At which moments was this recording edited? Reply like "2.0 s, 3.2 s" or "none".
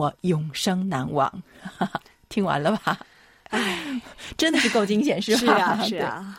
none